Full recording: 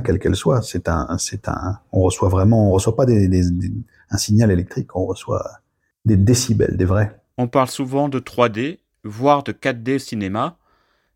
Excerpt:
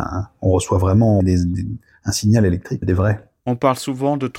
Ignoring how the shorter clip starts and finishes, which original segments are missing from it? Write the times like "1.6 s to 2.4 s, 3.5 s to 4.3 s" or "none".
2.7 s to 3.3 s, 4.9 s to 6.7 s